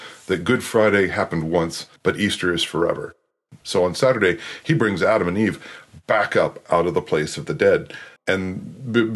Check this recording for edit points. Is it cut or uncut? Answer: cut